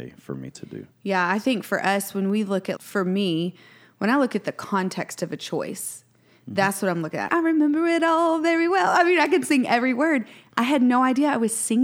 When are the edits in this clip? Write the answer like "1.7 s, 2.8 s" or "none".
2.8 s, 7.3 s